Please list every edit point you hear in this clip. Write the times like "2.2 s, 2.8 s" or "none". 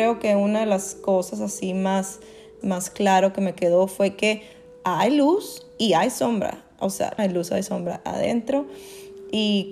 2.6 s, 7.2 s